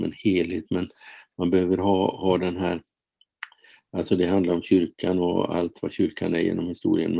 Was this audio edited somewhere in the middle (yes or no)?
no